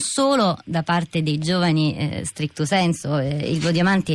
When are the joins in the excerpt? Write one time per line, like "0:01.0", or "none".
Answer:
none